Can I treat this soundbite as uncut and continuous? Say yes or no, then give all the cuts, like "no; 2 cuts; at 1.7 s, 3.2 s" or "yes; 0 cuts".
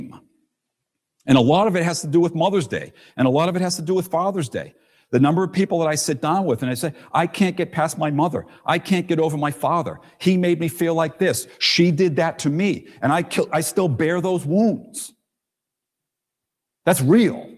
yes; 0 cuts